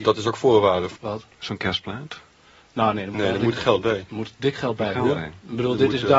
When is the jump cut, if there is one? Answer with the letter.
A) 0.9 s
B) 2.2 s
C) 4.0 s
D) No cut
A